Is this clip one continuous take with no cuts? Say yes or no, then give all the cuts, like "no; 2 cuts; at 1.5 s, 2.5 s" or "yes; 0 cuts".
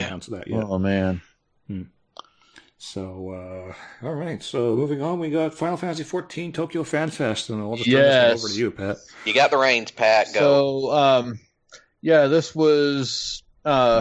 yes; 0 cuts